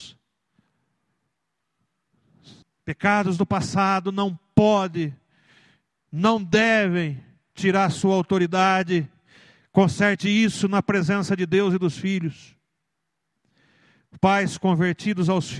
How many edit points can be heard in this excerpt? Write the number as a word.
one